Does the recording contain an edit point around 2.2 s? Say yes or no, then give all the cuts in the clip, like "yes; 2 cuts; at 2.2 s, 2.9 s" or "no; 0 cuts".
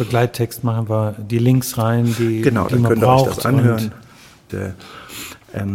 no; 1 cut; at 4.5 s